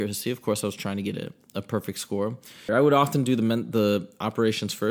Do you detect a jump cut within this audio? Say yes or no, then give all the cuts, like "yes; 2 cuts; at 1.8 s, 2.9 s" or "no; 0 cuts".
yes; 1 cut; at 2.7 s